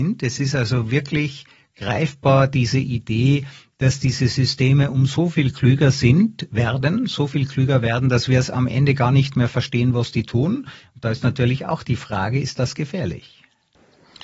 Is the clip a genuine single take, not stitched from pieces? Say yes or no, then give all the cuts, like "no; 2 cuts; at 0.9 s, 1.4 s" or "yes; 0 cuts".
yes; 0 cuts